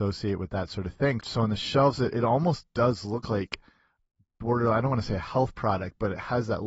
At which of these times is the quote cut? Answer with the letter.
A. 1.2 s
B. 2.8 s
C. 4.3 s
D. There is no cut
A